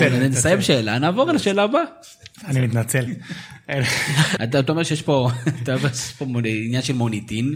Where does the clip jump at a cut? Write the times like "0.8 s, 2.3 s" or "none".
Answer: 4.4 s

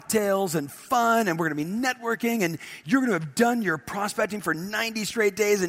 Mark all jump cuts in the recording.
none

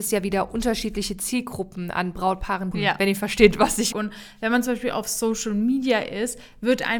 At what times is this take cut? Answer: 2.7 s, 3.9 s

